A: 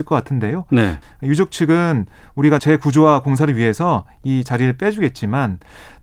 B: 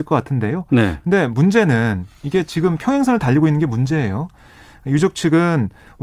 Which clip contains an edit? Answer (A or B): A